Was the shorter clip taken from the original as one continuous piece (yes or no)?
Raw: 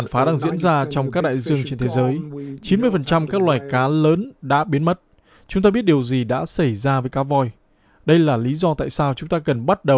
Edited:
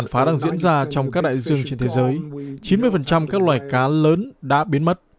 yes